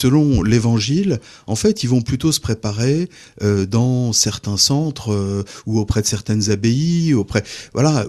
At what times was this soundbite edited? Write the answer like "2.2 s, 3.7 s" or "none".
none